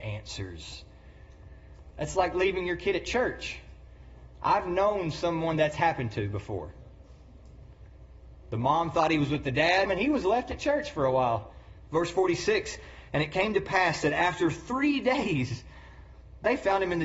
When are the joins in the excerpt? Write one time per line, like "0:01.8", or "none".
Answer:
0:01.9
0:09.9
0:11.9